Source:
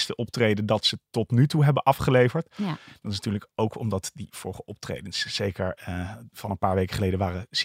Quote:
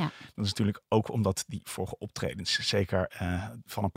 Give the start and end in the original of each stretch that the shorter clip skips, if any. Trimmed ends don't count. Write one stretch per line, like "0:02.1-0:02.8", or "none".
none